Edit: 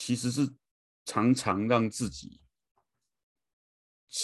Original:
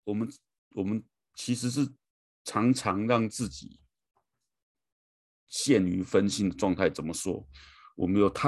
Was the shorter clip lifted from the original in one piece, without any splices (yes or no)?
yes